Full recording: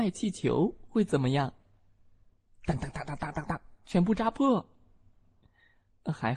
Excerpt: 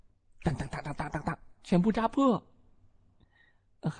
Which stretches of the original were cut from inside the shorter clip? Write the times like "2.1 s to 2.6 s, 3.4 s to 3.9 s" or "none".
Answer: none